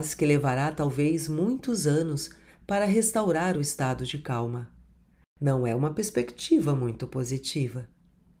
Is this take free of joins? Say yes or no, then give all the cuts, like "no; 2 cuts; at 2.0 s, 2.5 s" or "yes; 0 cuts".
yes; 0 cuts